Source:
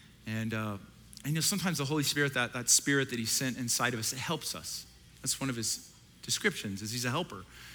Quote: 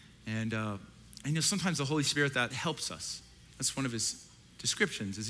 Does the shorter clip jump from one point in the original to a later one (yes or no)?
yes